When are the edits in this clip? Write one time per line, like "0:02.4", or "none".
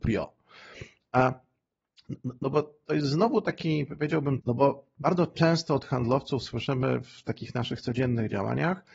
0:04.4